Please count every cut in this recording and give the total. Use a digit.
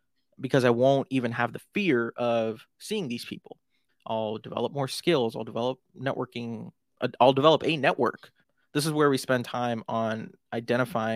1